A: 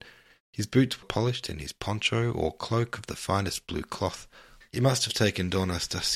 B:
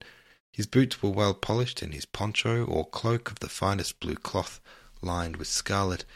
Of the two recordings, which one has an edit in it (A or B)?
A